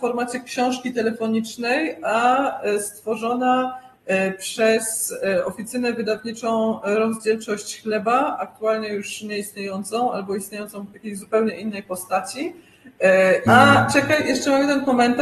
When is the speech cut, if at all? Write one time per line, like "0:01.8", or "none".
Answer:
0:13.5